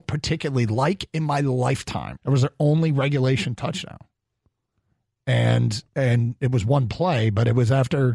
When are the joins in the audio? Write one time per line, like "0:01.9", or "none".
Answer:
0:02.2